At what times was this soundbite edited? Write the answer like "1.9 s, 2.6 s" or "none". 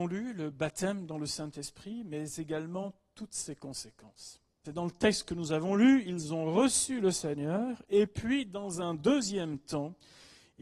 4.7 s